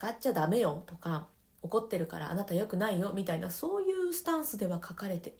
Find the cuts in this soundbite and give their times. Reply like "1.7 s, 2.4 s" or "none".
1.6 s